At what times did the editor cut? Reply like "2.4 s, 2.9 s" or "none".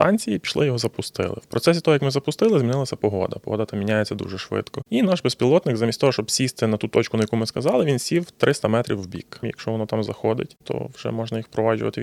9.4 s